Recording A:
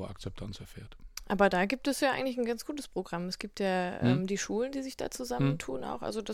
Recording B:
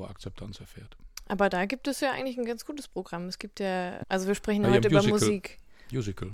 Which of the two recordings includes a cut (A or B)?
B